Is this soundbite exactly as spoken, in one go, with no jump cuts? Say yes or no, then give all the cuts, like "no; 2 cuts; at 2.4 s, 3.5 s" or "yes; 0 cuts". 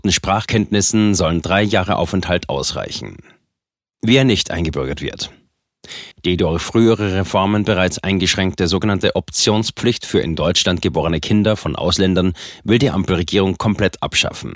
yes; 0 cuts